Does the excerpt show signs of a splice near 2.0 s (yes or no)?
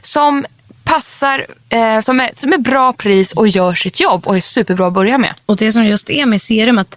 yes